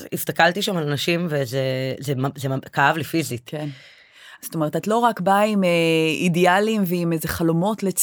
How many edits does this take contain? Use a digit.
1